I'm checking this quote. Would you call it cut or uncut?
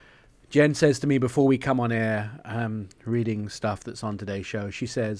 uncut